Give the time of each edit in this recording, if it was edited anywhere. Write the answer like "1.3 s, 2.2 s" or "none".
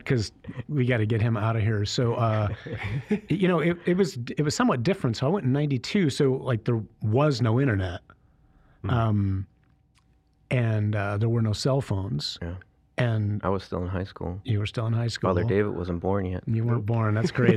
none

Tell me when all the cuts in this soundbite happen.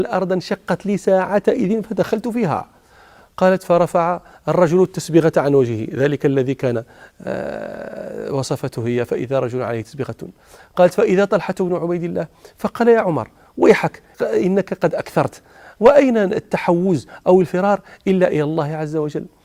14.1 s

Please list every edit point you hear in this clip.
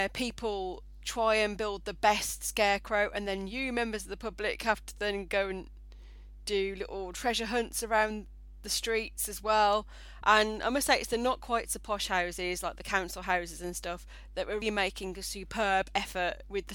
10.2 s, 14.6 s

